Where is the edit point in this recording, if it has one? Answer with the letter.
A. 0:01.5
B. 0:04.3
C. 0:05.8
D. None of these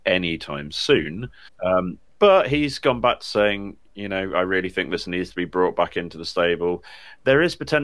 A